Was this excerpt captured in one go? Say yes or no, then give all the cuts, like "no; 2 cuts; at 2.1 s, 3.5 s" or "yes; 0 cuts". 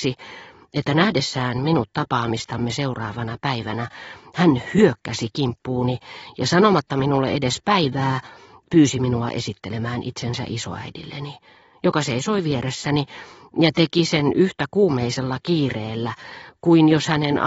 yes; 0 cuts